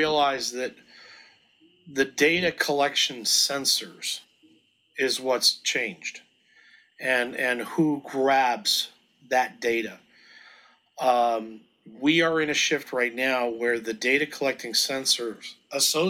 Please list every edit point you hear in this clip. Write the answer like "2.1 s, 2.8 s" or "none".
none